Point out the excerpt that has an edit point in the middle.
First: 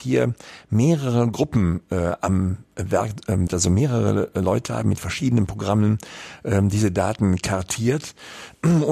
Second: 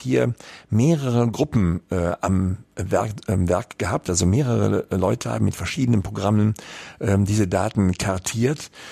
first; 1 cut; at 3.5 s

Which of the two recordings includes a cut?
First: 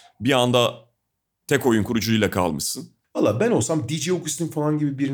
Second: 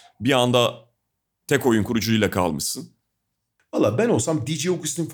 first; 1 cut; at 3.0 s

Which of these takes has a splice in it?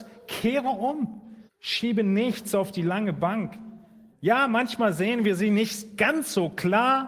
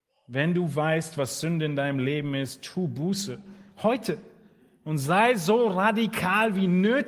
first; 2 cuts; at 1.5 s, 4.1 s

